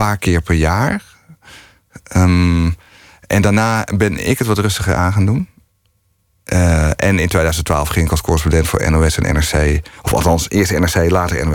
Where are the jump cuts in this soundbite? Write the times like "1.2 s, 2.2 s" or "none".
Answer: none

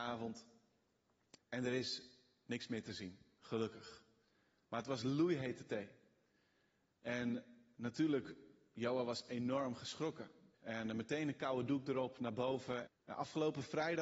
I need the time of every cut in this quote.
1.4 s, 10.5 s, 12.9 s

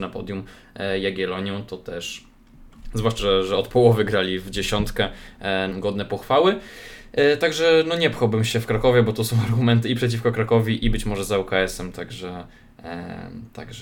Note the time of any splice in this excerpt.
3.2 s, 5.7 s

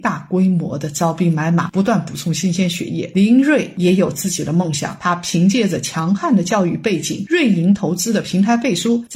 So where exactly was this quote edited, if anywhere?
none

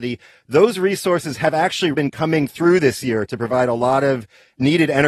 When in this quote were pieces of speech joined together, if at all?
1.9 s

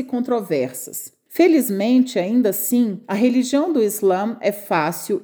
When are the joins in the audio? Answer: none

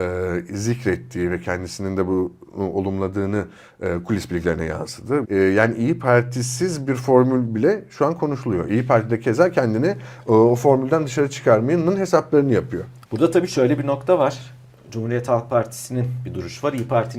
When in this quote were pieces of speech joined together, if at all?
5.2 s, 13.0 s

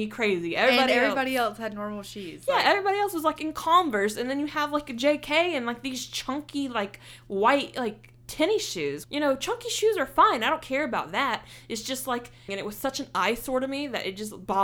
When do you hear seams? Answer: 9.0 s, 12.5 s

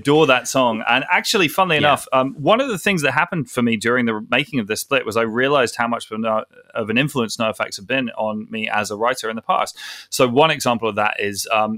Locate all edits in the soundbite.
none

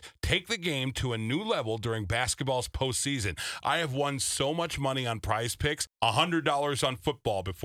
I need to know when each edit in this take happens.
none

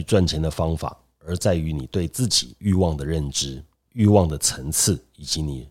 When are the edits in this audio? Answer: 3.8 s

